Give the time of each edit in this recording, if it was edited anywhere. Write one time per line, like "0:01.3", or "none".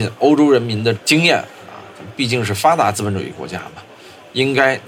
none